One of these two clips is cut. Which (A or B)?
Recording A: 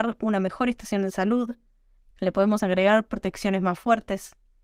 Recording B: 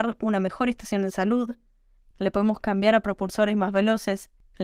A